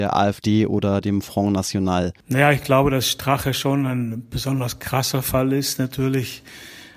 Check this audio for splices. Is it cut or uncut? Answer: uncut